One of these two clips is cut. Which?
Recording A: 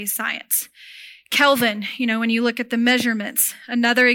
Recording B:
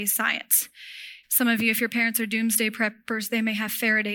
B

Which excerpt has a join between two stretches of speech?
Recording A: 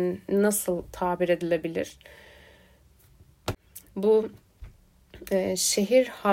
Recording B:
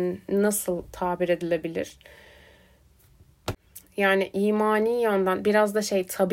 A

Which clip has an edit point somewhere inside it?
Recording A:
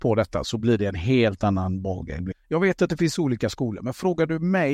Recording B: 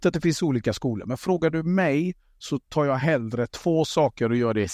A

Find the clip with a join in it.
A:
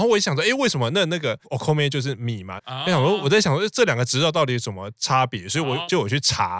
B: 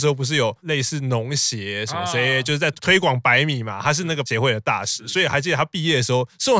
A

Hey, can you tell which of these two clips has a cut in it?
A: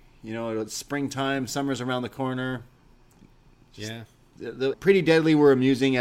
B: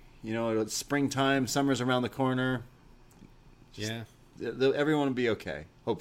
A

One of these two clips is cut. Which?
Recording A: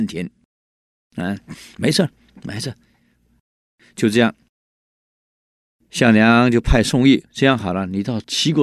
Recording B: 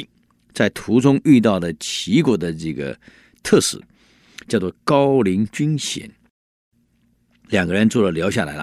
A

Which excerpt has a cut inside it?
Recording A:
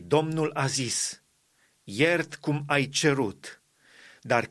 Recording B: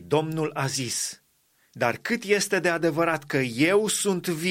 B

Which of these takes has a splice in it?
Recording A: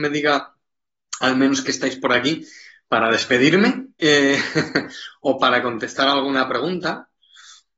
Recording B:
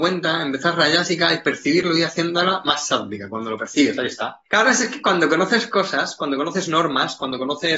B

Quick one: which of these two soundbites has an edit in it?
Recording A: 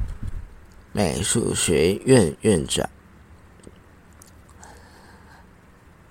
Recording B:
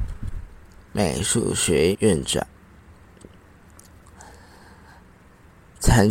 B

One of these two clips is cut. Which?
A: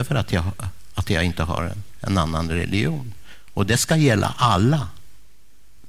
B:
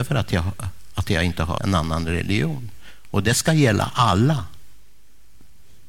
B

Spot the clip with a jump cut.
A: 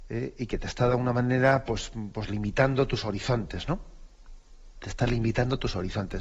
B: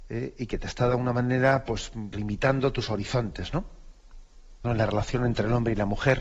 B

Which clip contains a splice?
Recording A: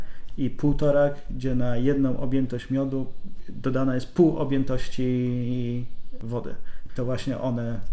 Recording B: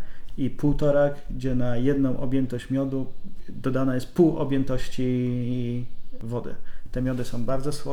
A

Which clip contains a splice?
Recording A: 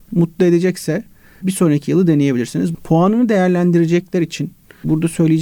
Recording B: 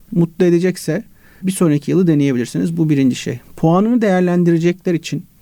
A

